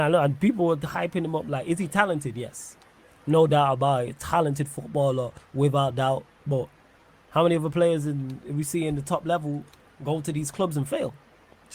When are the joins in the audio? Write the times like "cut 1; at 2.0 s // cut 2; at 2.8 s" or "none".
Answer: none